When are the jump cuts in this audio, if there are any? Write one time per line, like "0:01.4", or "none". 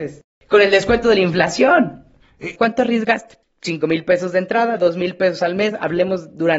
0:02.6